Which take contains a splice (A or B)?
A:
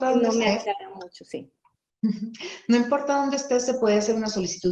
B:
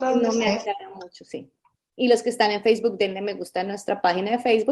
B